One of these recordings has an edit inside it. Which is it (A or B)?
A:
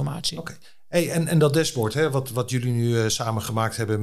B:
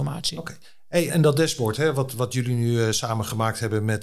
B